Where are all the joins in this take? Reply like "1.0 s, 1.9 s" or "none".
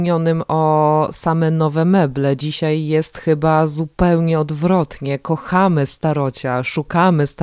none